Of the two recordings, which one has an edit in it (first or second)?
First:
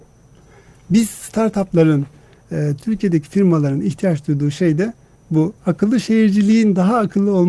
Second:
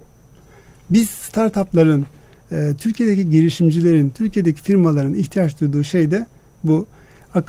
first